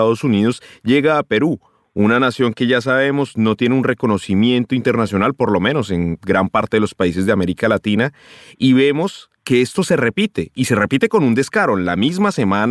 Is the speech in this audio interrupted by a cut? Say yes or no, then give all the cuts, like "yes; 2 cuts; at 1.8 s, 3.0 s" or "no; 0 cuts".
no; 0 cuts